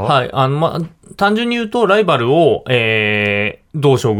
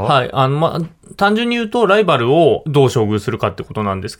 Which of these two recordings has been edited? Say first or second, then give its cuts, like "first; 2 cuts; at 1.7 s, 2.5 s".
second; 1 cut; at 2.6 s